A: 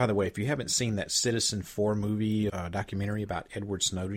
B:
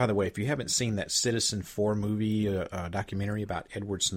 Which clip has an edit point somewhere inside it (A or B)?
A